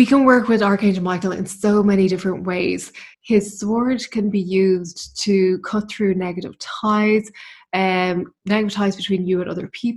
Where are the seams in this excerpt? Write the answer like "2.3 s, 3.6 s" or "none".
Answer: 3.1 s